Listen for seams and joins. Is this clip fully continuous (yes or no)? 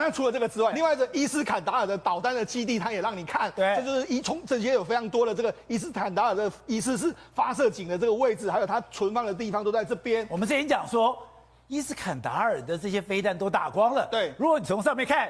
yes